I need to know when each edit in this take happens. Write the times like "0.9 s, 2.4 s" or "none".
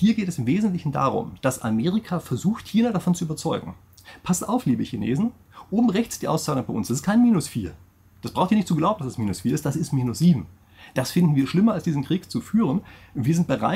none